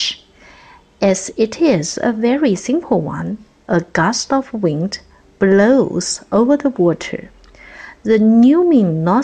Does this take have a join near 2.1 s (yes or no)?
no